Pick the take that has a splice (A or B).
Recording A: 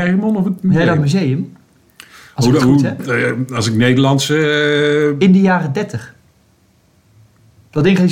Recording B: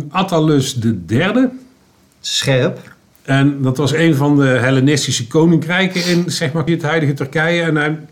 B